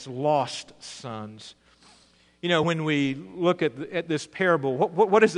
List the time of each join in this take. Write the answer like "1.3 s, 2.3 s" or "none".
none